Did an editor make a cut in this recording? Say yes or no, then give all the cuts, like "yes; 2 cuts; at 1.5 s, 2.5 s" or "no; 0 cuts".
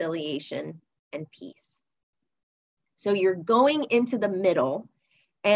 no; 0 cuts